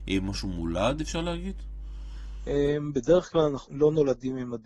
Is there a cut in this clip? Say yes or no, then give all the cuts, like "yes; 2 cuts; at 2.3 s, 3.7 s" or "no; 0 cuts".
yes; 1 cut; at 3.7 s